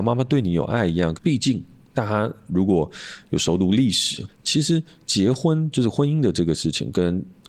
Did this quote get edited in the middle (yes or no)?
yes